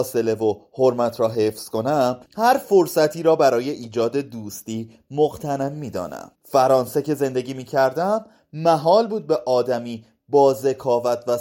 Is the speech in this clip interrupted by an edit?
yes; 2 cuts; at 2.3 s, 6.4 s

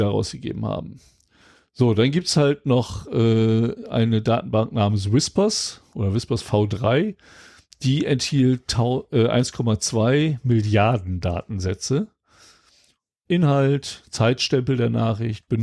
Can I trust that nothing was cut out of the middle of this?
no; 1 cut; at 13.3 s

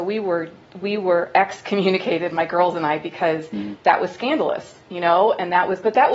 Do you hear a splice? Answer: no; 0 cuts

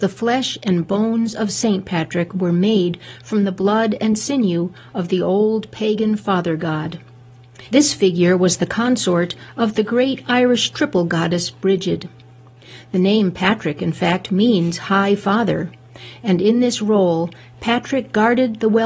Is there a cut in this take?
yes; 1 cut; at 7.7 s

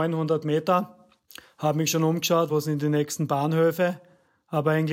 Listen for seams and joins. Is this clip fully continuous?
yes; 0 cuts

